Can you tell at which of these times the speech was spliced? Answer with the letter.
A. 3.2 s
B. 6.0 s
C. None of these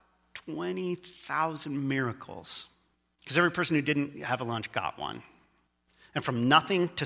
A